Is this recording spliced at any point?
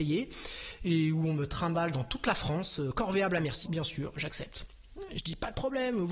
yes; 1 cut; at 3.7 s

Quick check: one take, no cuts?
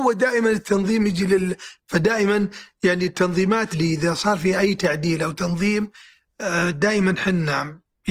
no; 2 cuts; at 1.8 s, 3.7 s

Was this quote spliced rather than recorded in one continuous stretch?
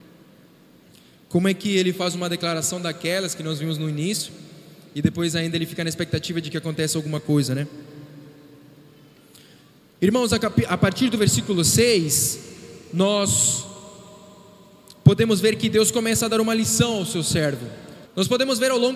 yes; 1 cut; at 18.1 s

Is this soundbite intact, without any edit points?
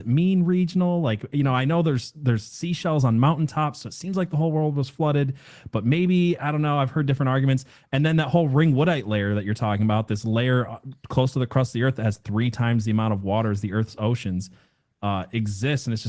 yes; 0 cuts

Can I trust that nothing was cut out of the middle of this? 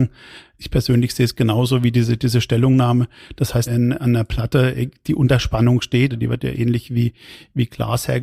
no; 2 cuts; at 3.7 s, 6.1 s

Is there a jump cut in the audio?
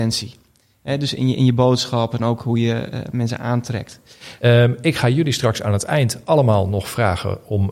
yes; 1 cut; at 4.4 s

